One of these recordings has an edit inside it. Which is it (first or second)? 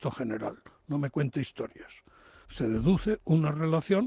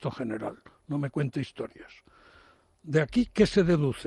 first